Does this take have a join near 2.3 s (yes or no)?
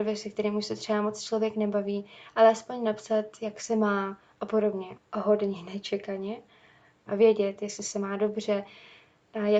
no